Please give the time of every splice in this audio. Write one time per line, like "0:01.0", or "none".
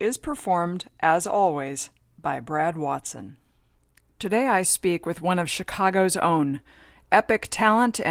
none